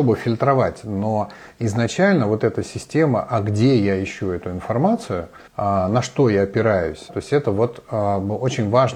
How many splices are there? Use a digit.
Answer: 2